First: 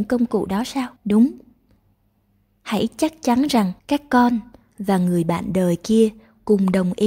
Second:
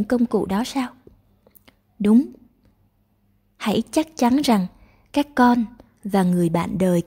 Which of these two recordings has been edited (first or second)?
first